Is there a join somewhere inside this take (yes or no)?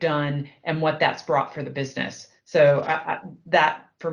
no